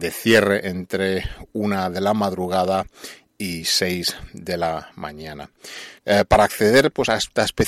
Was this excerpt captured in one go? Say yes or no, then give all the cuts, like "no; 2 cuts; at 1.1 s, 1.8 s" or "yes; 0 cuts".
no; 1 cut; at 6.0 s